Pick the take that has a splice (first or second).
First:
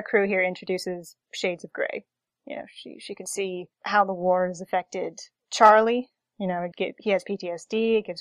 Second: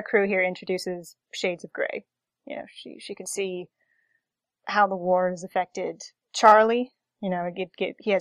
first